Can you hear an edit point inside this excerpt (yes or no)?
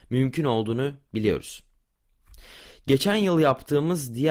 no